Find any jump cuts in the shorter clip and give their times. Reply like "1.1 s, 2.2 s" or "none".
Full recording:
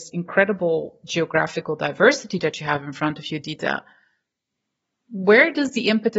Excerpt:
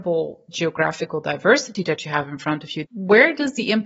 2.8 s

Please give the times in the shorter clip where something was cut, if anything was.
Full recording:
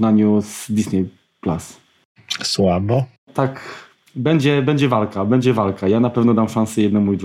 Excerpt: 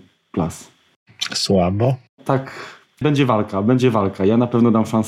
3.0 s

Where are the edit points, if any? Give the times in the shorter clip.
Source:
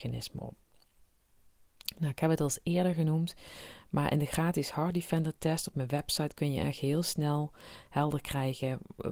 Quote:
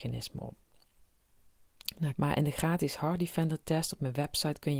2.1 s

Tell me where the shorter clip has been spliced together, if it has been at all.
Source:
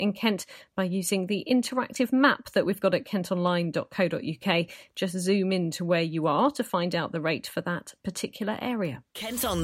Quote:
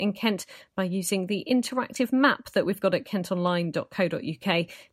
none

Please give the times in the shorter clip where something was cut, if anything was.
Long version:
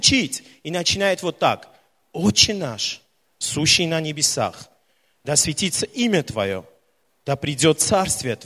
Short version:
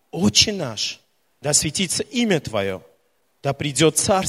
1.3 s

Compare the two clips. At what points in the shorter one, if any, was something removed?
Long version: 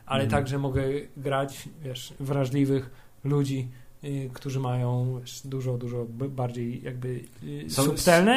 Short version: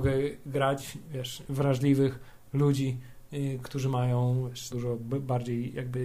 4.7 s

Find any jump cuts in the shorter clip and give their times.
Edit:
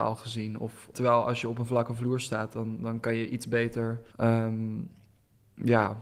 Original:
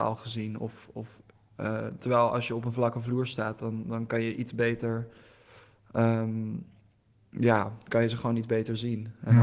0.9 s, 4.1 s

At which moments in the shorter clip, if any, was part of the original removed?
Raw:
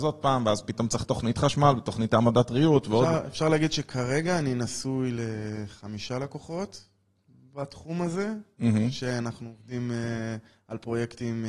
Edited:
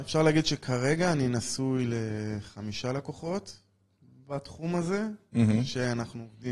none

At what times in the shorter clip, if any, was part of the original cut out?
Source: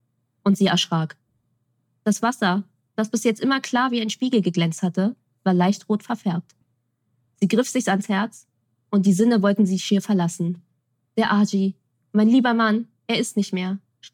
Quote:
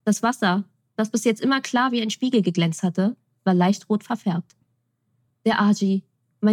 5.3 s

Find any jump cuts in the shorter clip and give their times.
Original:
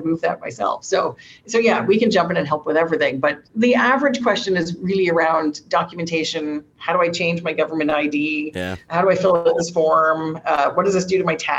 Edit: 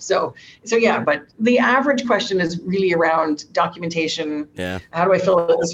1.0 s, 4.5 s

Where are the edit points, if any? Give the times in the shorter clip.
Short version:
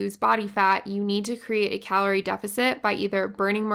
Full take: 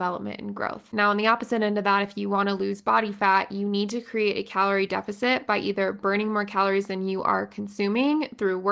none

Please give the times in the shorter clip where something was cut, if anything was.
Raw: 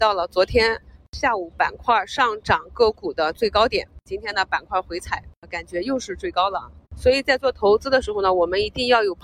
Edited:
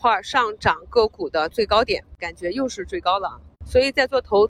2.2 s

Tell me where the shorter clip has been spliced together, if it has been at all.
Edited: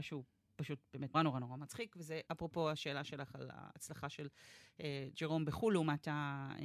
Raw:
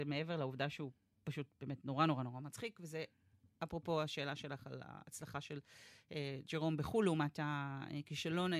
1.1 s, 2.3 s

